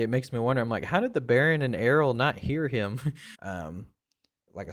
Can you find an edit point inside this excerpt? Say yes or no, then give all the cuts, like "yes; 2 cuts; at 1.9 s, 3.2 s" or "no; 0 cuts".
yes; 1 cut; at 3.3 s